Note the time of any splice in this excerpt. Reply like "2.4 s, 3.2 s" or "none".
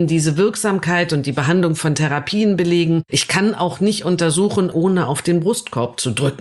3.1 s, 4.7 s